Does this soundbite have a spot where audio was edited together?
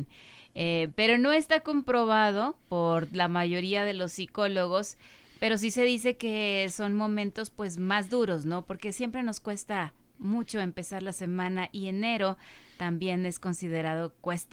no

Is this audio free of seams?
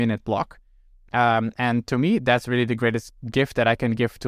yes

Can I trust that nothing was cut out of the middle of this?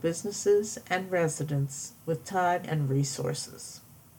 no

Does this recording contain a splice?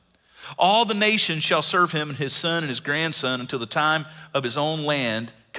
no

